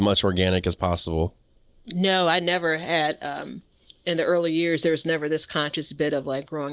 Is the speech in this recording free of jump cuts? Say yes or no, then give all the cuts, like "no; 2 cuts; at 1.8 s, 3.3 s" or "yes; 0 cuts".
yes; 0 cuts